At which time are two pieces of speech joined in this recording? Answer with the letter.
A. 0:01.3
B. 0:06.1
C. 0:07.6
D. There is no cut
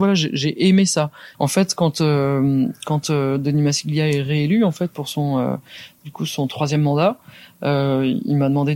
A